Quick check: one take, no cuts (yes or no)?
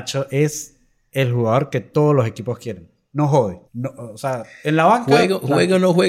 no